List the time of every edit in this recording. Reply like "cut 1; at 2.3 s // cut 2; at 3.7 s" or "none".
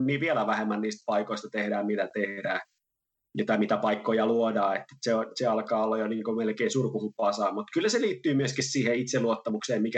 none